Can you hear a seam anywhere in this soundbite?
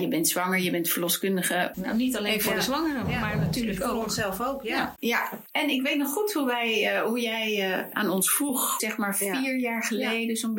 yes; 2 cuts; at 1.7 s, 5.0 s

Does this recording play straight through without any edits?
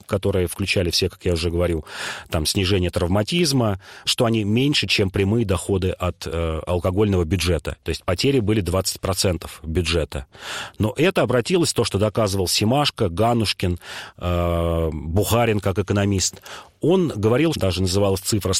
no; 3 cuts; at 4.1 s, 7.8 s, 17.5 s

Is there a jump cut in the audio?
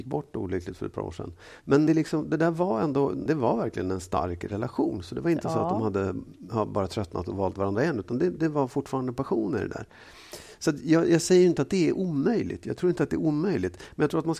yes; 2 cuts; at 1.9 s, 3.3 s

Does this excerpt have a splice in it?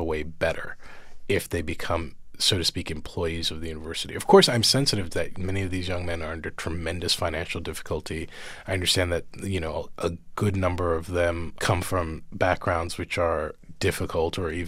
no; 0 cuts

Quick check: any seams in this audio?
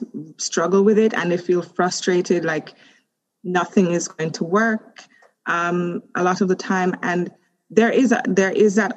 no; 0 cuts

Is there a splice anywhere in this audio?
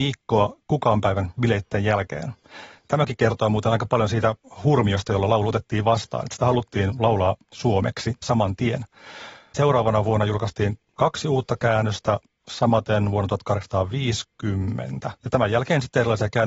yes; 1 cut; at 15.2 s

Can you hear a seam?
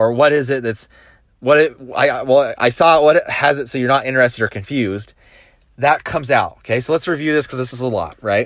no; 0 cuts

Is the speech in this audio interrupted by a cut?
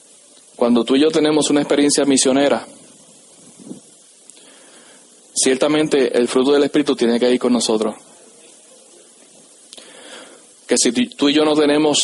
yes; 1 cut; at 10.5 s

